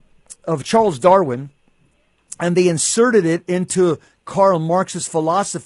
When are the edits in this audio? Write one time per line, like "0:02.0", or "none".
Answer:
none